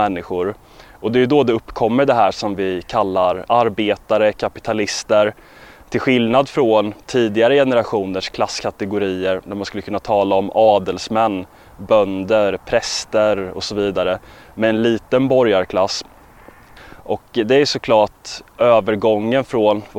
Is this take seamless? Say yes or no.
no